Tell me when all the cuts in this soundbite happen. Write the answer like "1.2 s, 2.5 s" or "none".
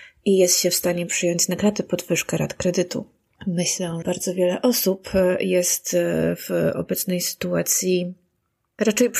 4.0 s